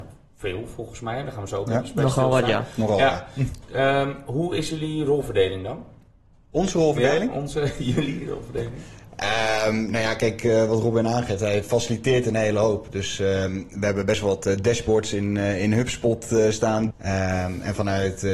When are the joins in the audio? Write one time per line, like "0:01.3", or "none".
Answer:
0:16.9

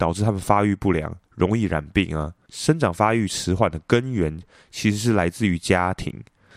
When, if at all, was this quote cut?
0:02.5

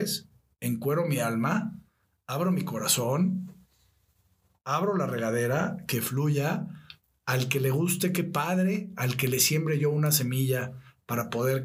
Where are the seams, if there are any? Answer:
none

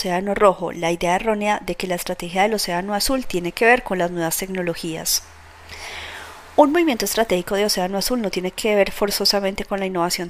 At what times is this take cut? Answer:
none

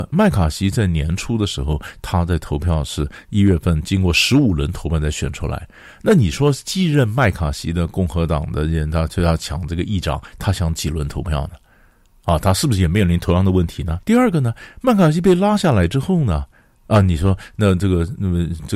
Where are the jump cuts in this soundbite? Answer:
0:14.0

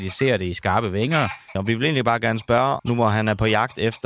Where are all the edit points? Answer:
0:01.6
0:02.8

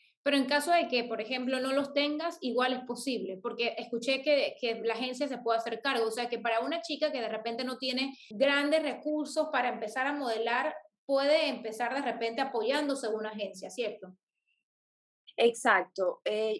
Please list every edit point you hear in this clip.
0:08.3

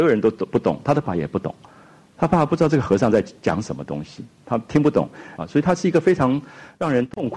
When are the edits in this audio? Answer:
0:01.0
0:05.4

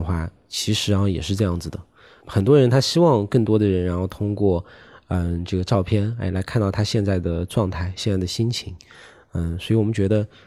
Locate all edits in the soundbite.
none

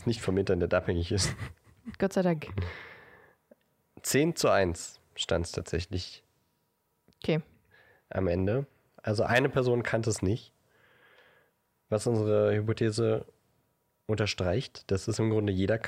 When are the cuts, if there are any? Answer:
0:09.0

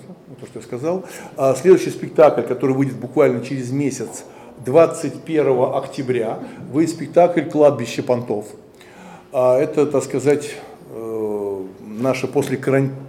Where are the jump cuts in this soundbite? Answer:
none

